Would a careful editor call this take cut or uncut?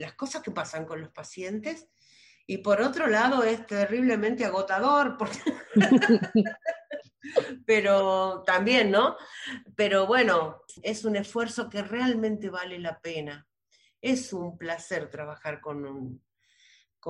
uncut